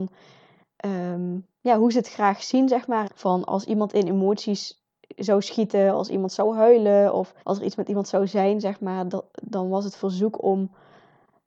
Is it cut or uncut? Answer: cut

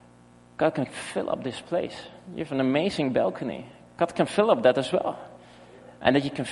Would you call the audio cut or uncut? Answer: uncut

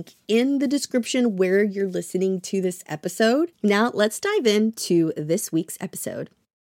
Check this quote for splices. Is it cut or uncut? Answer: cut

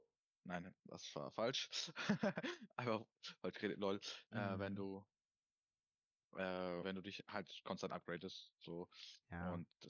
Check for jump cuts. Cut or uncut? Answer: cut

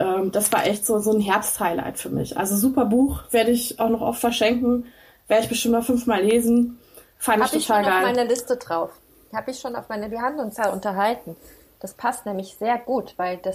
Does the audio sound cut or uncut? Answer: uncut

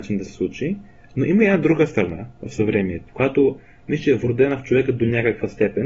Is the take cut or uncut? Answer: cut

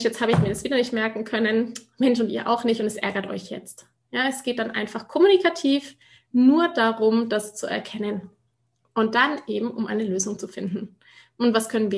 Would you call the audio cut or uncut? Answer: uncut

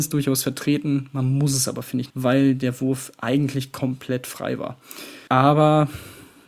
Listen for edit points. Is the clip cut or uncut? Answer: cut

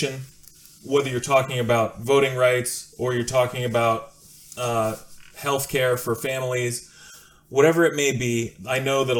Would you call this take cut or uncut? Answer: uncut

